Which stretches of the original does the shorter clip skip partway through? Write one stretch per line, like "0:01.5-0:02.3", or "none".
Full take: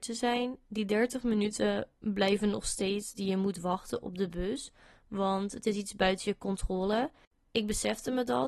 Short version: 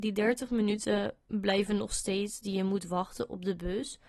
none